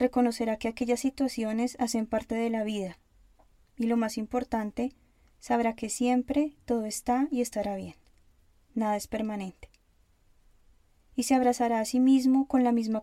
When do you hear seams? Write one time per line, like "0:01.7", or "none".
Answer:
none